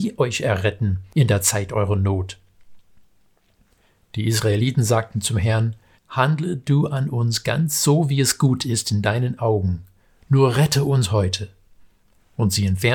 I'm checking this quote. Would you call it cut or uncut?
cut